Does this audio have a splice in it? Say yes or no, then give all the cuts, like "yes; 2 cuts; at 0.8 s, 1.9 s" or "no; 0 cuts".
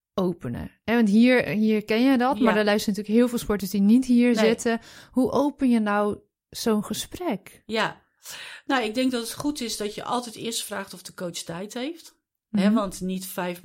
no; 0 cuts